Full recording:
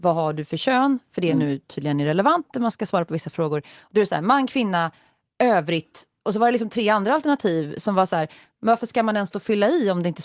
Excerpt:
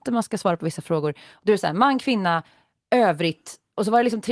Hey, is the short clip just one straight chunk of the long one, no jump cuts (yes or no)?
yes